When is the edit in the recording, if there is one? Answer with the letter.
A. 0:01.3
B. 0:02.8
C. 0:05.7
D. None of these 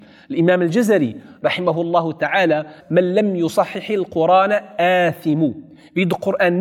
B